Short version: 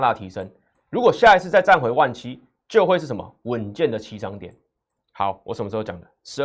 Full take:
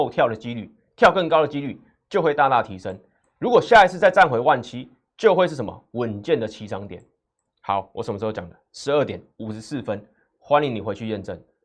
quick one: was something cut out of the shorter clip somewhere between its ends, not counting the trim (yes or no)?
no